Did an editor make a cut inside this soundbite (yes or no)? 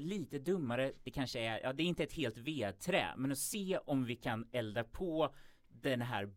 yes